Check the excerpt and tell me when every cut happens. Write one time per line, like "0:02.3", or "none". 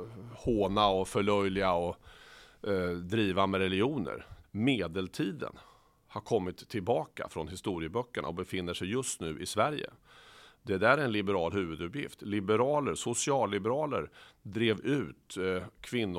0:04.4

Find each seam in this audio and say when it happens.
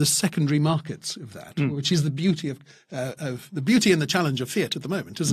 none

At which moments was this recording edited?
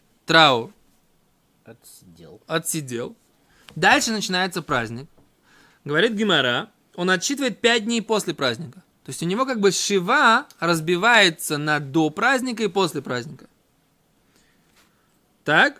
none

